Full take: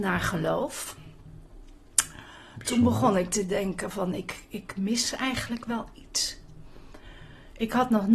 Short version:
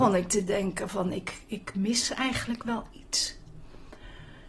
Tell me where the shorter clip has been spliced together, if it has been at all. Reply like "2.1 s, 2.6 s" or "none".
none